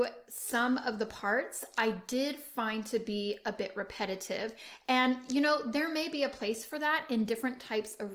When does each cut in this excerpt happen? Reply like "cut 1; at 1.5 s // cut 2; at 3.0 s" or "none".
none